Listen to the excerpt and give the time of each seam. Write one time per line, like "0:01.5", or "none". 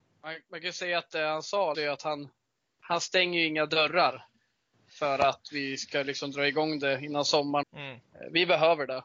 0:01.7
0:07.6